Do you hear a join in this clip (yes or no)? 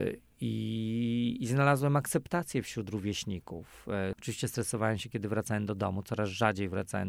yes